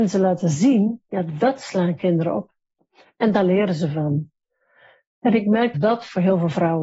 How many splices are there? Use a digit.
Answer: 1